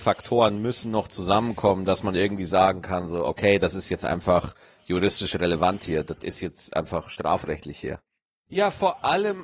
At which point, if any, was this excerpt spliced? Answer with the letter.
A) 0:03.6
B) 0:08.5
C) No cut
B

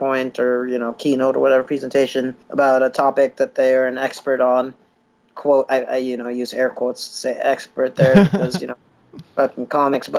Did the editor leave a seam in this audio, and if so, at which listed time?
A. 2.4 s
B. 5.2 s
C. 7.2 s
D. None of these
A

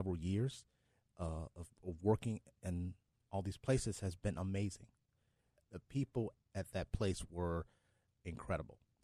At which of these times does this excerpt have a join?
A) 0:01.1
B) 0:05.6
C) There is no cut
B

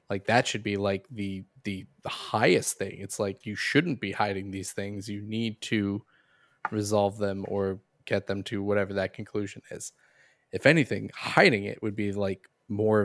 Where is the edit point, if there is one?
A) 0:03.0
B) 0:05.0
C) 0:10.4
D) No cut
D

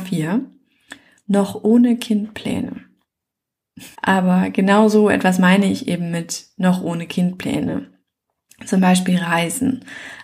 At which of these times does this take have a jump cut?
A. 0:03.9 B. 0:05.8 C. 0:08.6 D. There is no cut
A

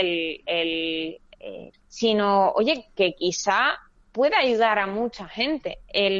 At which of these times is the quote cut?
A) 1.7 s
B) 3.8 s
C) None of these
A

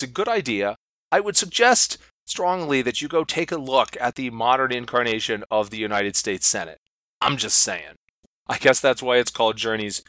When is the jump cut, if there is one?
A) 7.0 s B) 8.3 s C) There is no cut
B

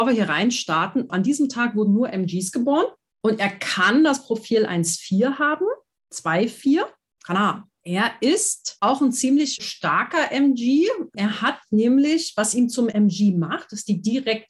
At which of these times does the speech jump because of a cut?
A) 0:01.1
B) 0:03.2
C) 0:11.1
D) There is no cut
A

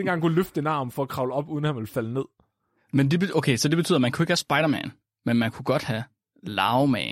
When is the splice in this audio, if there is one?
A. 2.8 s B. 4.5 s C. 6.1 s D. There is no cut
D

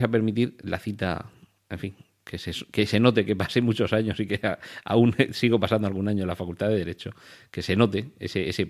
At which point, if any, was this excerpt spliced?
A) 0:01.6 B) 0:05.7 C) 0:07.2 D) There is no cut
D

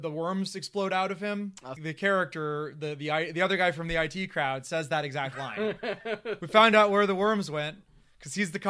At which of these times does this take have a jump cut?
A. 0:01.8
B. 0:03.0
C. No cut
A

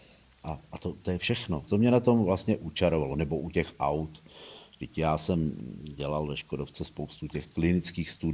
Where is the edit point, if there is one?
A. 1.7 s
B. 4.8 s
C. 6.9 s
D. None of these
A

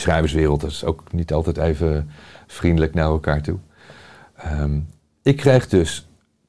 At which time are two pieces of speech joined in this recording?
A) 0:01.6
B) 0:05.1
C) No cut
C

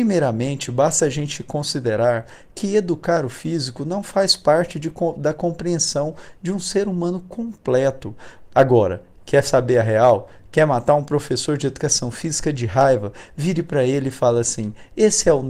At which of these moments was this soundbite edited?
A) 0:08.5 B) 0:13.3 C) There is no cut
A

